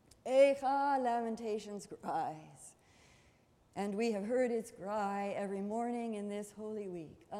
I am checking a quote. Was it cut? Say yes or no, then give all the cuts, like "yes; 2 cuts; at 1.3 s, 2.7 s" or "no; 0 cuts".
no; 0 cuts